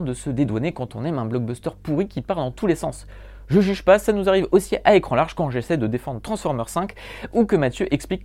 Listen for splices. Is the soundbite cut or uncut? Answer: uncut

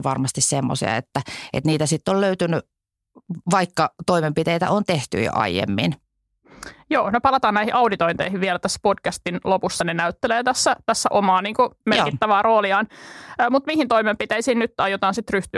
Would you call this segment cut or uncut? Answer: uncut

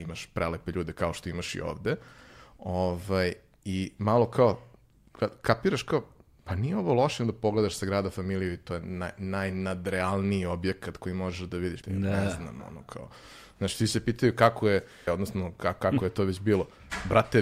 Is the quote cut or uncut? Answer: cut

